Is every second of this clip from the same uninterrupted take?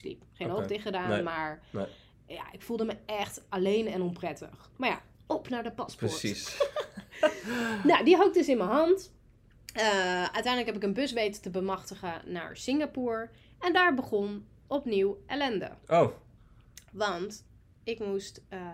no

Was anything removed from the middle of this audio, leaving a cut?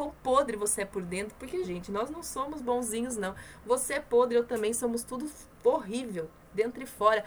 yes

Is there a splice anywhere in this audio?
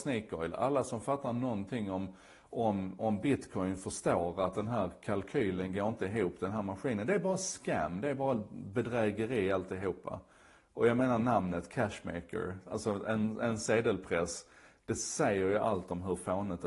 no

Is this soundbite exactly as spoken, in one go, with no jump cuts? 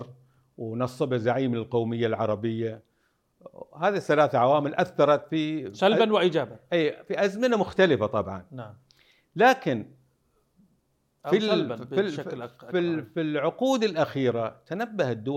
yes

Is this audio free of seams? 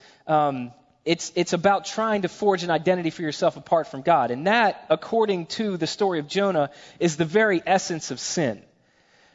yes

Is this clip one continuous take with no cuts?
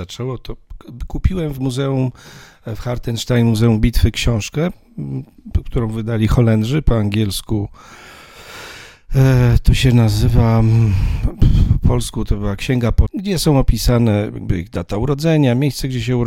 no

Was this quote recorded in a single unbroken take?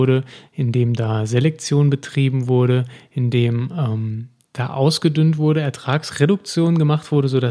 yes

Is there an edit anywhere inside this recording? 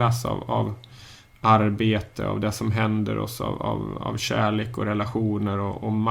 no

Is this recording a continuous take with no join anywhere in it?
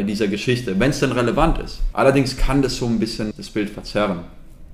no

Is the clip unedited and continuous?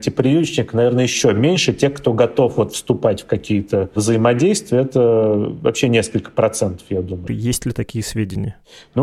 no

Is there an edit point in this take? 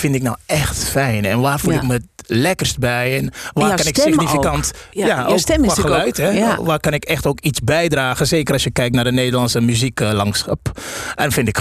no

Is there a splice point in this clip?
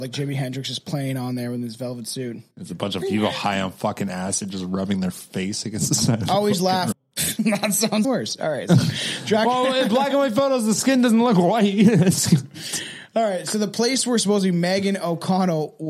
yes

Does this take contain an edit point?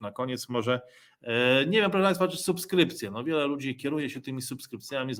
no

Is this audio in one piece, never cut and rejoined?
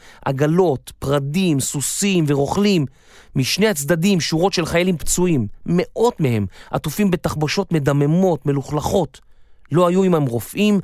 yes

